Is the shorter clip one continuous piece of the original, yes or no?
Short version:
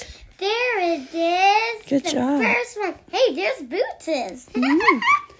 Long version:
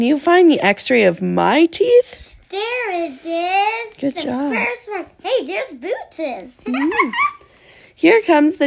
yes